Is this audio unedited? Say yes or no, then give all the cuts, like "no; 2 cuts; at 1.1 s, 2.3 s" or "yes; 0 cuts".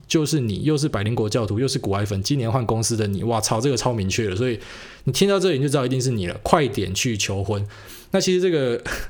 yes; 0 cuts